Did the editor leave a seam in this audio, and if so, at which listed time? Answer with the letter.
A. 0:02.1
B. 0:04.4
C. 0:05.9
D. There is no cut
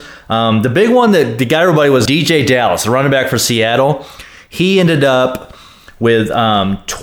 A